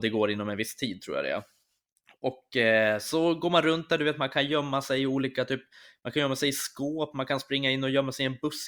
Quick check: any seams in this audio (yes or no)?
no